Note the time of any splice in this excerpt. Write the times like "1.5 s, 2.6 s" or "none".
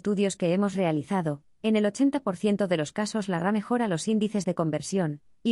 none